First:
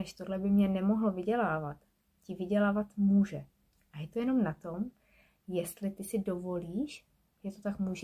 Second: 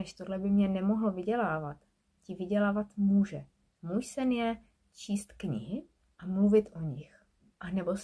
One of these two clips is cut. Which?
second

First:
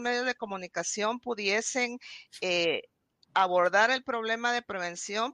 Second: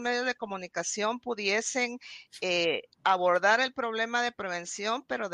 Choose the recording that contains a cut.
second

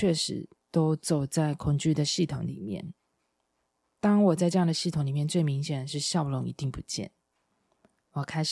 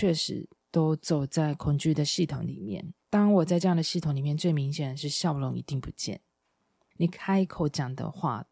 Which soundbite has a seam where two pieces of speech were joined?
second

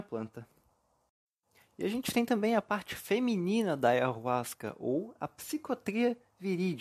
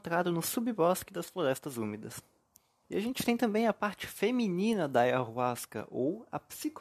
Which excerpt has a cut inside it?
second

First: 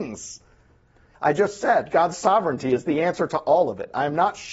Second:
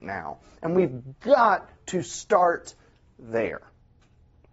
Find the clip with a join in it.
first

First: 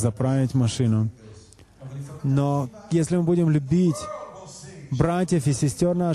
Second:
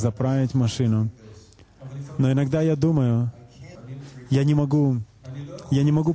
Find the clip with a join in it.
first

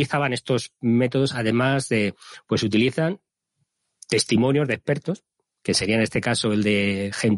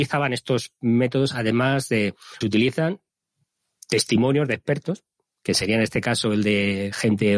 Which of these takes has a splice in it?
second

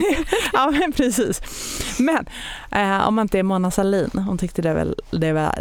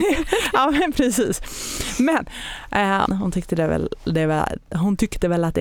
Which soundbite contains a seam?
second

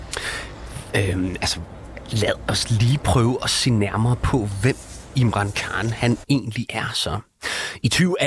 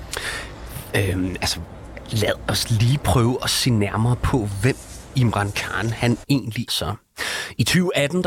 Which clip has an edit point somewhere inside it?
second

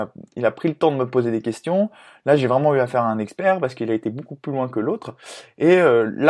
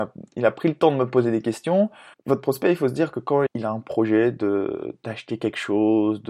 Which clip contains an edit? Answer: second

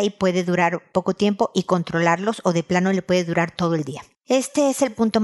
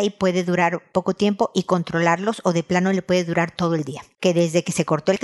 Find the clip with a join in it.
second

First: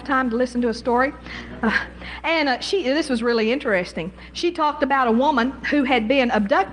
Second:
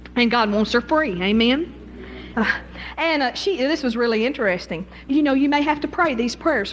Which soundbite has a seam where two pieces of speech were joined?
second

